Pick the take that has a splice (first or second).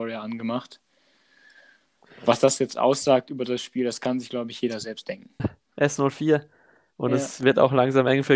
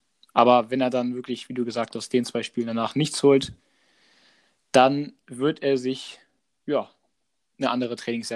first